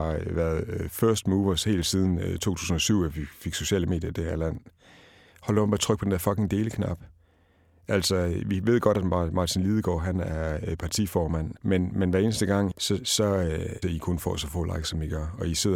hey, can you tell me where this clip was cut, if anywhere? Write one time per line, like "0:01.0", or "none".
0:11.6
0:12.7
0:13.8